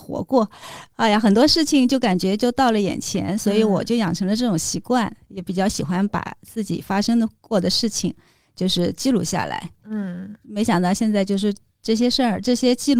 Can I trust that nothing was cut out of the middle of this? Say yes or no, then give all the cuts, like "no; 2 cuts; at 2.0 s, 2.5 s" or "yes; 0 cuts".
yes; 0 cuts